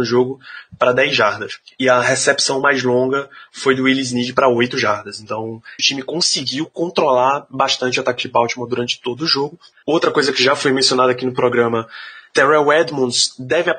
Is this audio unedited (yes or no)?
no